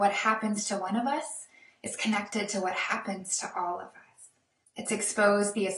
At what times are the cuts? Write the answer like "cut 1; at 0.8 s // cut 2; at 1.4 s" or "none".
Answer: cut 1; at 4.6 s